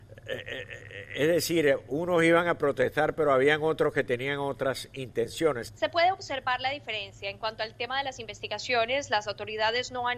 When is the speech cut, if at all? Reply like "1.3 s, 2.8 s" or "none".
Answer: 5.7 s